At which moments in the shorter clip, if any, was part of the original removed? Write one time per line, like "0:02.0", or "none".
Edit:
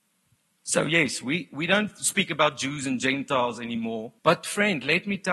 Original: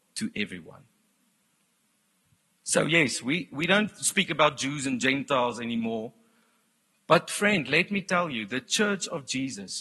0:04.2